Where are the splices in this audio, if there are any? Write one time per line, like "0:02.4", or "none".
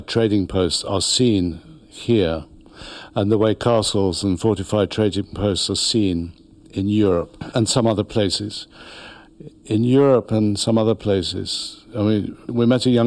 none